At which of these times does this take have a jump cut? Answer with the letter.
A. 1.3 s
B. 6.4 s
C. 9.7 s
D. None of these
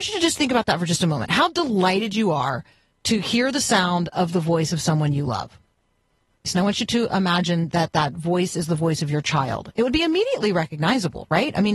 B